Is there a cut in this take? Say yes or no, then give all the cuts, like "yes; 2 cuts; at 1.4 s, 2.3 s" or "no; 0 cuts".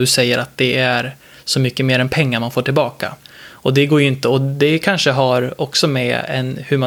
yes; 1 cut; at 3.2 s